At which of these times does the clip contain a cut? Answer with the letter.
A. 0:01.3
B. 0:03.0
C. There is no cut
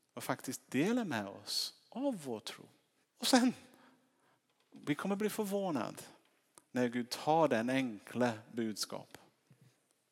B